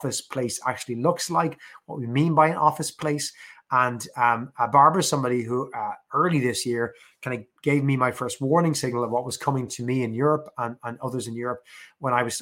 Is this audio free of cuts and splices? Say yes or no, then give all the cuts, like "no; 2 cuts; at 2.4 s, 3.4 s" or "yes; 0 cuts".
yes; 0 cuts